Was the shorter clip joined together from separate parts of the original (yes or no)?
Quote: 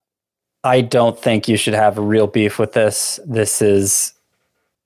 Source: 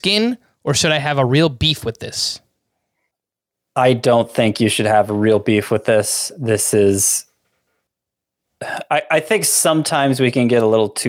no